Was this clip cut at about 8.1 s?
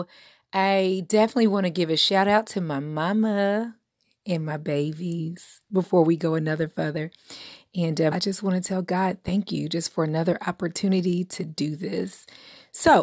yes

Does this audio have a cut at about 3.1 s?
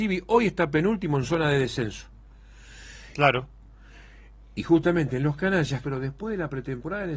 yes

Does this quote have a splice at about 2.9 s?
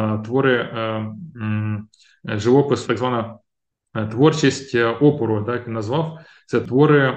yes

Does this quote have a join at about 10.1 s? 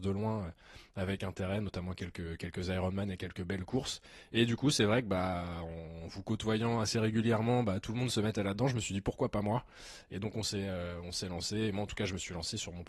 no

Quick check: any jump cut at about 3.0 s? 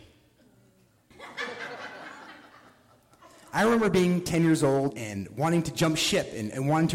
no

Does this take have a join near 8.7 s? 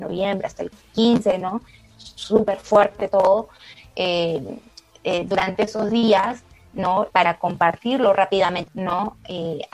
yes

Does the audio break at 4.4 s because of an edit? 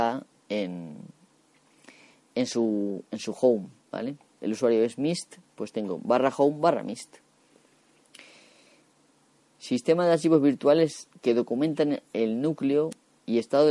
yes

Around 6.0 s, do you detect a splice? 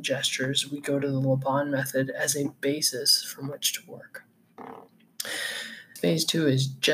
yes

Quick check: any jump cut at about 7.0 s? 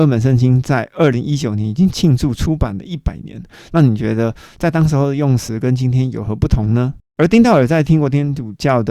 yes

